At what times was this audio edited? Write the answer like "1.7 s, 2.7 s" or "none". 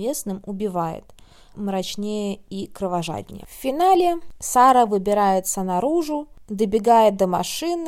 1.5 s